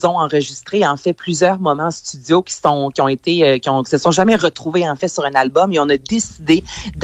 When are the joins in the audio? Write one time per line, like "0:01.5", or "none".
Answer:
none